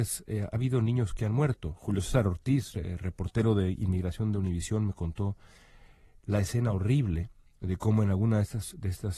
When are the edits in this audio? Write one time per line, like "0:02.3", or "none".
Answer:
none